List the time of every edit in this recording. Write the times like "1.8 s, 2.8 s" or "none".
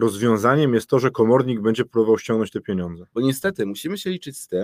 3.1 s